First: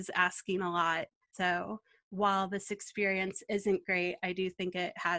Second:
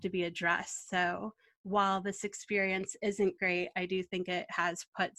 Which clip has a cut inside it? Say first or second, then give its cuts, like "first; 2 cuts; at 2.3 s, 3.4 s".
first; 1 cut; at 1.3 s